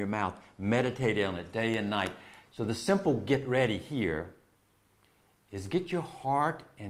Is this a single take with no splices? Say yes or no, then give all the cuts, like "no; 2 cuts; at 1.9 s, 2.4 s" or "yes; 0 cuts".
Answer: yes; 0 cuts